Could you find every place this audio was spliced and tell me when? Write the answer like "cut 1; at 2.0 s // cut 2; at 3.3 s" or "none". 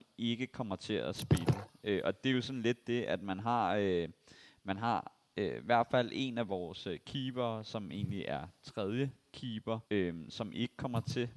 cut 1; at 9.9 s